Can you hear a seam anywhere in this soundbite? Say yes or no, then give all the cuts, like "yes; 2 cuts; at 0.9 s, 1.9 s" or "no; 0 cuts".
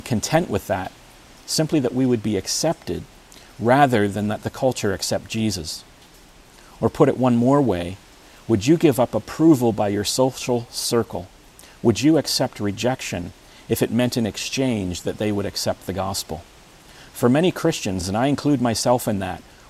no; 0 cuts